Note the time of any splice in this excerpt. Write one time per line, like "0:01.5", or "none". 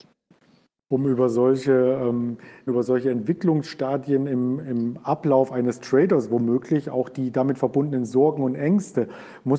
0:02.7